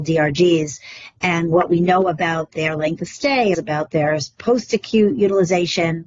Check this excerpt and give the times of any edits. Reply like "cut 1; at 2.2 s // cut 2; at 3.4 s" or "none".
cut 1; at 3.5 s